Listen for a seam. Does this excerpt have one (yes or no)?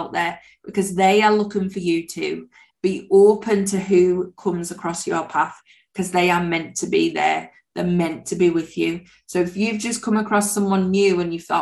yes